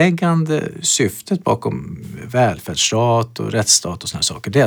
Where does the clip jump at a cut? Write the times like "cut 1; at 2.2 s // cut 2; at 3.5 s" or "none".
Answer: none